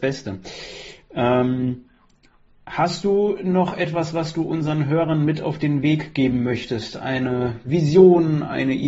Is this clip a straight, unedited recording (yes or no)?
yes